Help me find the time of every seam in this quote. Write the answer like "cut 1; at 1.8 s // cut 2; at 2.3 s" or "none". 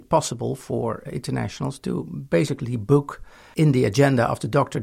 cut 1; at 1.1 s